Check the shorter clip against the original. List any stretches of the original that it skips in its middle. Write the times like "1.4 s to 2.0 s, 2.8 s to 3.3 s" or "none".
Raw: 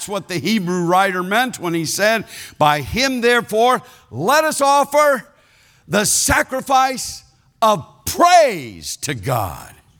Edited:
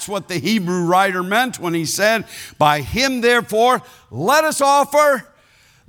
none